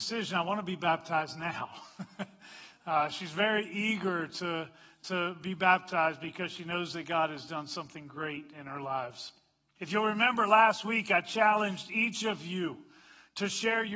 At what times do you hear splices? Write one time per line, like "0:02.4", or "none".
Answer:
0:09.8